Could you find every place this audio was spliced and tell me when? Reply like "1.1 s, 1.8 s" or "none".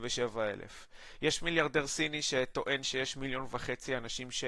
none